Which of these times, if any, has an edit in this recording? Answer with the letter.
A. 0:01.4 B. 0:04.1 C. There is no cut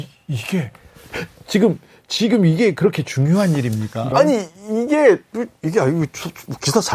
B